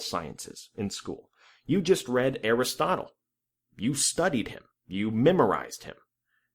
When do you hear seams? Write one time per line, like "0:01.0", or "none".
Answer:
none